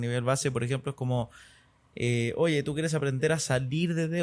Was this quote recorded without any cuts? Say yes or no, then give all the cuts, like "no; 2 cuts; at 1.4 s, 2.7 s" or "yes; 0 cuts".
yes; 0 cuts